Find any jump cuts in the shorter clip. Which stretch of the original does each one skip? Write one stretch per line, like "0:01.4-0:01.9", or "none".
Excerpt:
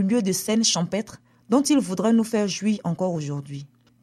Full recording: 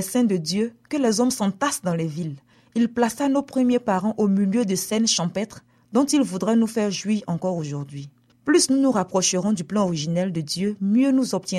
none